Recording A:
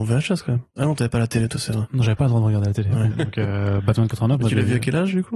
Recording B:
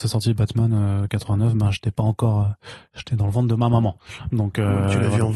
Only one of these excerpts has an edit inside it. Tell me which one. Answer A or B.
A